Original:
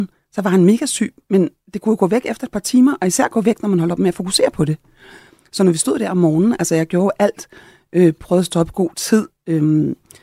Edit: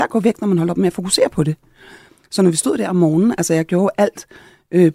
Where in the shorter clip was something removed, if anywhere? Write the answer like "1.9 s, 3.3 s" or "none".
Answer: none